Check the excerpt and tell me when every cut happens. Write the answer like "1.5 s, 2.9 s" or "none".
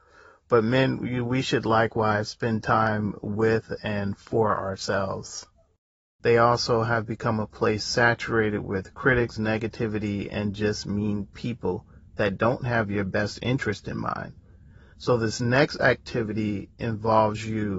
6.2 s, 9.4 s